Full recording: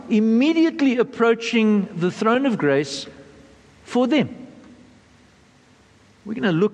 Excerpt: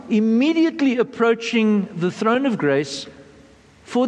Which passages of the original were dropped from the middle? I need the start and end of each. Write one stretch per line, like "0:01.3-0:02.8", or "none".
none